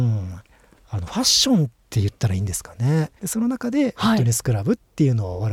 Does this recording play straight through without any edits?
no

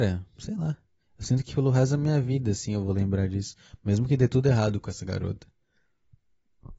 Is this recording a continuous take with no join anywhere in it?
yes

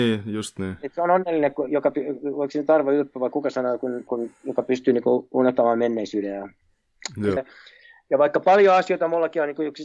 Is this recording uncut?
no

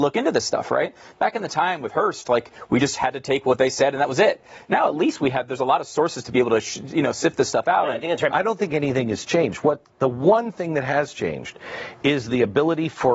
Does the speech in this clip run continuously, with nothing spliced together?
no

